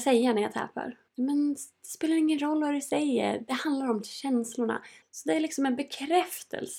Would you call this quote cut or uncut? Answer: cut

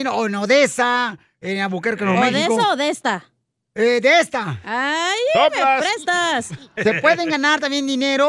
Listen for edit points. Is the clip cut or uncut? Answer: uncut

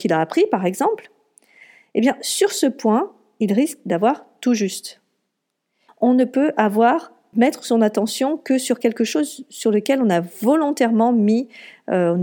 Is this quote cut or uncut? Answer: cut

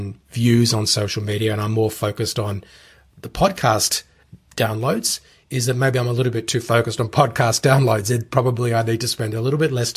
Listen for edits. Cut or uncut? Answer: uncut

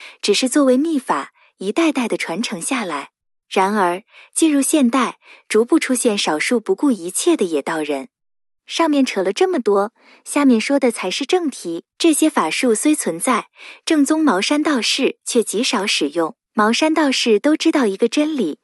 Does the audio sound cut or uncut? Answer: cut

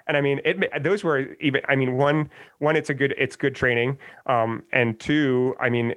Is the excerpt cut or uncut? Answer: uncut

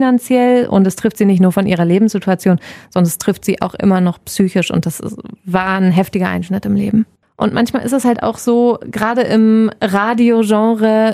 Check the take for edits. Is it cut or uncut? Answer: uncut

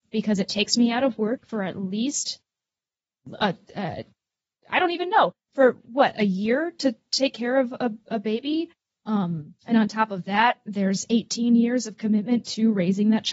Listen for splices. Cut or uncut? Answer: cut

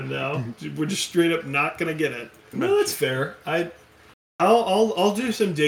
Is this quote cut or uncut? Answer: cut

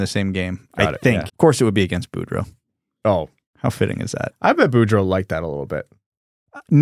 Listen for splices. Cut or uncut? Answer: cut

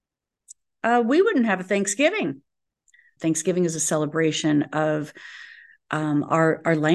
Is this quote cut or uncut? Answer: cut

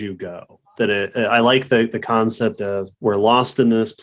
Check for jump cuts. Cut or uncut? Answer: cut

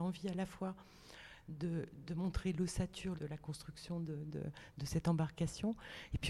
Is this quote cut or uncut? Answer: cut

